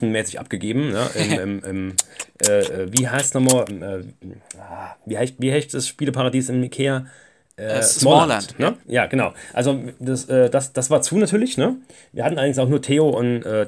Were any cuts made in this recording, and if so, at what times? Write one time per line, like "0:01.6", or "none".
0:03.7
0:08.8

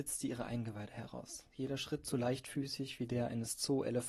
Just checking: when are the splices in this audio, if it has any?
none

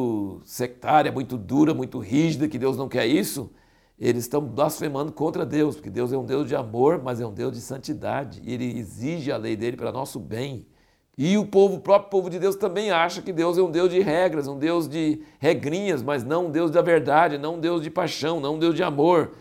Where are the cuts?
none

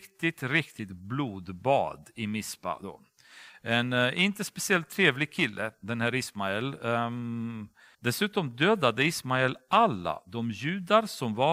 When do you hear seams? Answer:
0:07.9

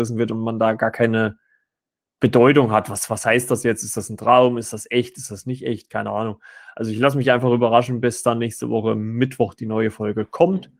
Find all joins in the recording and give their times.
none

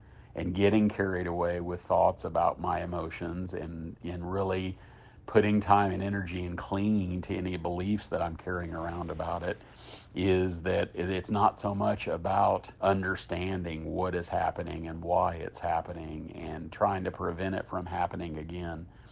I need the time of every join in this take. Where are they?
0:04.0
0:12.7

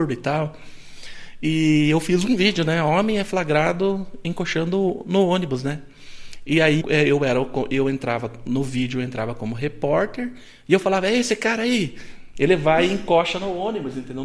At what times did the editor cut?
0:06.8
0:12.3

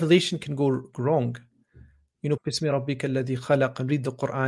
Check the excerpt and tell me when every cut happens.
0:02.4

